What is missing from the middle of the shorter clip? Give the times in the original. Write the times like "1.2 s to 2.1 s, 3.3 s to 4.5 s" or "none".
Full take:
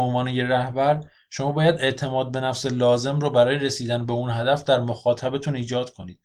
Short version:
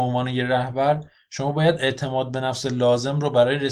none

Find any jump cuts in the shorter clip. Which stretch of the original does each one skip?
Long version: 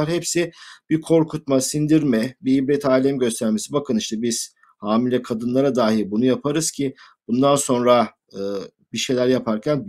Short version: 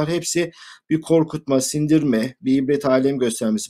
none

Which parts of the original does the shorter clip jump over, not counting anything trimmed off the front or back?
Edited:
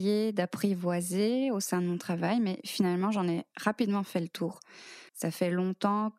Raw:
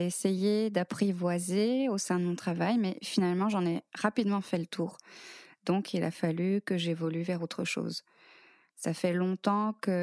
5.5 s to 8.7 s

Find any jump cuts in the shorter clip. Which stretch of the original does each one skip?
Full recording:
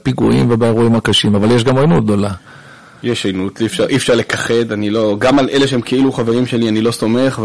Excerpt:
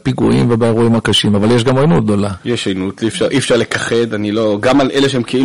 2.4 s to 3.0 s

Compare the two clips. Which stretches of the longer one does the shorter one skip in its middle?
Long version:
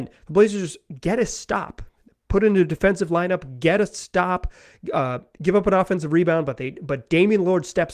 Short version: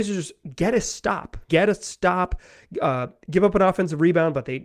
1.9 s to 3.6 s

